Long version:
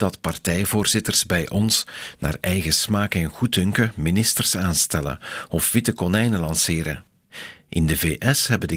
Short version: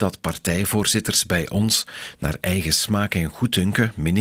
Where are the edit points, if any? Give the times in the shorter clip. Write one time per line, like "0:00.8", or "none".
none